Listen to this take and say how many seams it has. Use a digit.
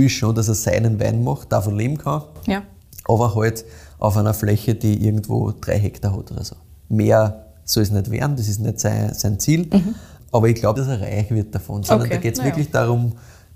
1